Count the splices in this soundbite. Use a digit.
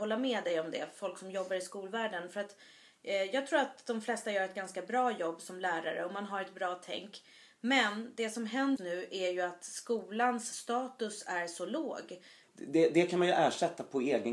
2